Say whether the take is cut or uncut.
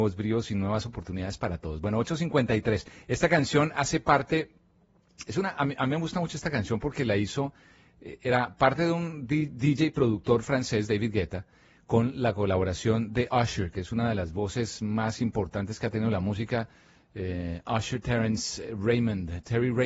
uncut